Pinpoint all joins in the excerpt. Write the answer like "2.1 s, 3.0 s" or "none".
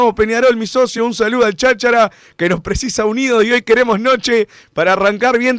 none